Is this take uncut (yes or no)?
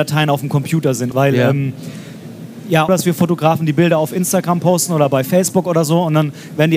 no